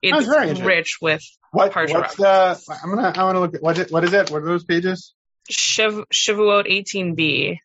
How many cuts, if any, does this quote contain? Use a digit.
0